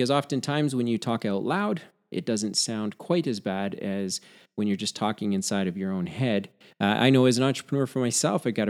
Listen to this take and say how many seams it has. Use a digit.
1